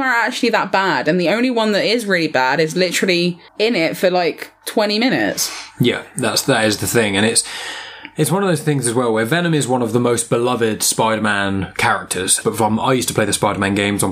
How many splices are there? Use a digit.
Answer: 2